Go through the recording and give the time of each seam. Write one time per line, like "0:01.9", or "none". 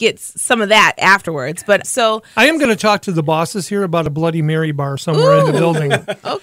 0:01.8

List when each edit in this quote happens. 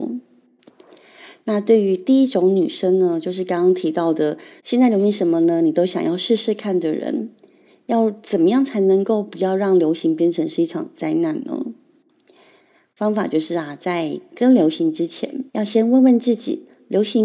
0:04.6
0:15.5

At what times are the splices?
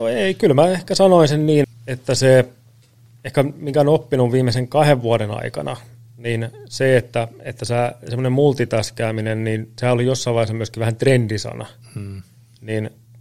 0:01.6

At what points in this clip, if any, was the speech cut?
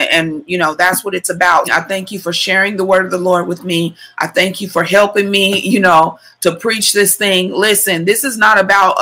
0:01.6

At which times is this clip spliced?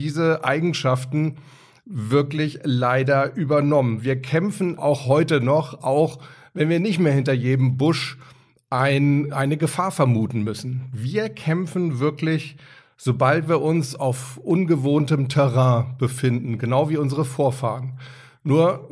0:04.8

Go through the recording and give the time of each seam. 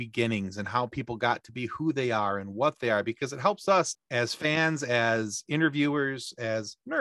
0:03.9

